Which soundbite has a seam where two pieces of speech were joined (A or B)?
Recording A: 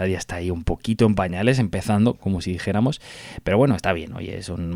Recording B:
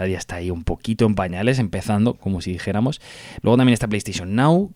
B